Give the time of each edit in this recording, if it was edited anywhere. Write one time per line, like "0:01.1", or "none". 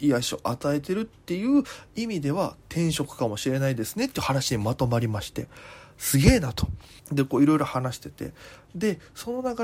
0:07.0